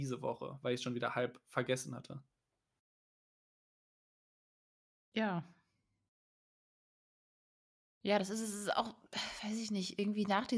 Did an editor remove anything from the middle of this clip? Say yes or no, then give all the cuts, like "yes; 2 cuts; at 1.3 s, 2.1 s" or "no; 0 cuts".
no; 0 cuts